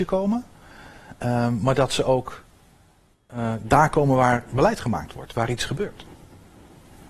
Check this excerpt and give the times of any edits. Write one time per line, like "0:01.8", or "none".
none